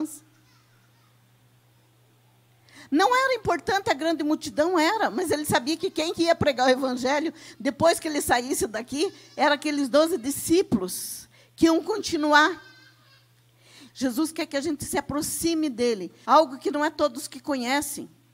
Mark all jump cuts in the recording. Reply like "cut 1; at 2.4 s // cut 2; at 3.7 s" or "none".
cut 1; at 13.9 s // cut 2; at 16.2 s

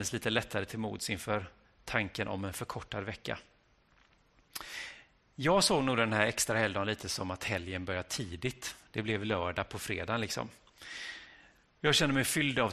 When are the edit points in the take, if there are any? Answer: cut 1; at 11.7 s

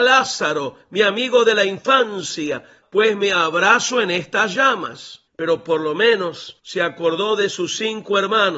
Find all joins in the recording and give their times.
cut 1; at 2.8 s // cut 2; at 5.3 s // cut 3; at 6.6 s

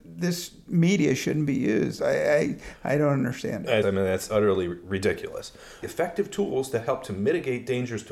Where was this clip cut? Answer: cut 1; at 3.8 s // cut 2; at 5.8 s

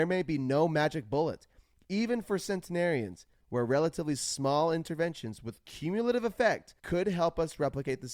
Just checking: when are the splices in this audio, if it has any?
cut 1; at 3.4 s // cut 2; at 6.8 s

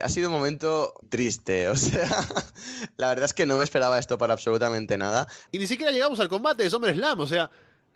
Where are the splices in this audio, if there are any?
cut 1; at 1.0 s // cut 2; at 5.5 s

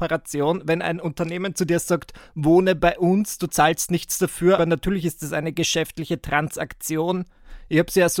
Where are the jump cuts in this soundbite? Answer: cut 1; at 4.6 s

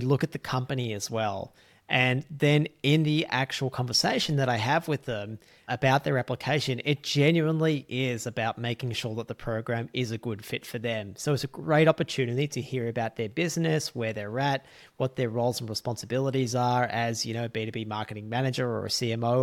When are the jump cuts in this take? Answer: none

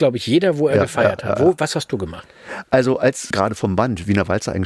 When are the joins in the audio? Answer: cut 1; at 3.3 s

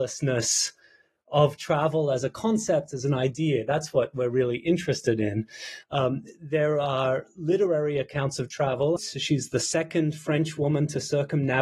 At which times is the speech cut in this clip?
cut 1; at 5.8 s // cut 2; at 9.0 s

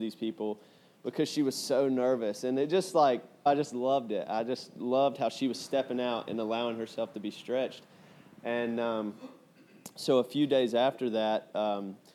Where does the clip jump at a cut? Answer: cut 1; at 3.5 s

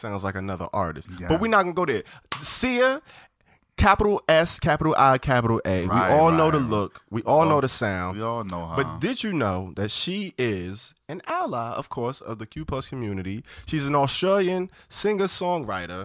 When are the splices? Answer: none

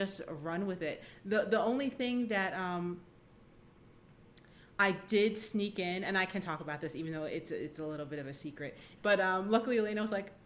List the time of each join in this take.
cut 1; at 9.0 s

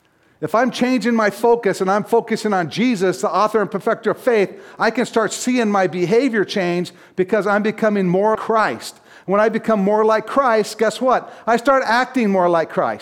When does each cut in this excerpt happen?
cut 1; at 8.4 s

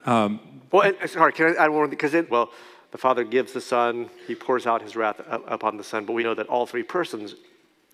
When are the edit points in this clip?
cut 1; at 2.3 s // cut 2; at 6.2 s

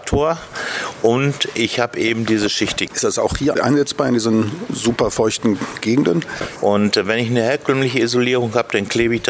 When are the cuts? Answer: cut 1; at 2.9 s // cut 2; at 6.6 s

